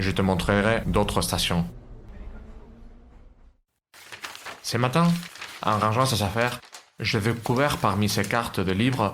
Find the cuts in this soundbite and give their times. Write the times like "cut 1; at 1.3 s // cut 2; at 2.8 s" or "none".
none